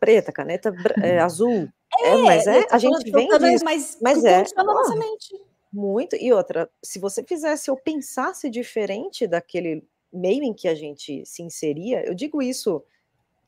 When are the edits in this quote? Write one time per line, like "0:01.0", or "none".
0:03.6